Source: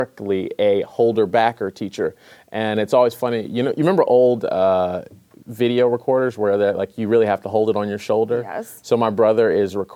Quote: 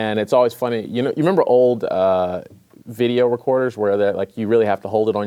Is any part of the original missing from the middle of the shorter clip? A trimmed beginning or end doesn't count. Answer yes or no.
no